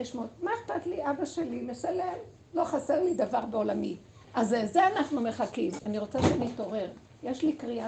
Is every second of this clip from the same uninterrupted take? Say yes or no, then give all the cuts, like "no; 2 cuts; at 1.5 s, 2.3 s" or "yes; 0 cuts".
no; 2 cuts; at 4.2 s, 5.8 s